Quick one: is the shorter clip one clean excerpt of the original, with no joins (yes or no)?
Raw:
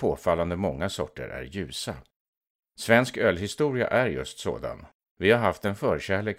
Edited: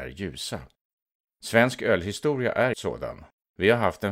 no